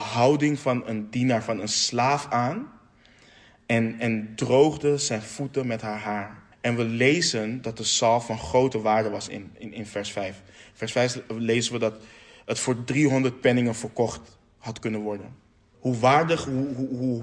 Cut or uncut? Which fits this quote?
cut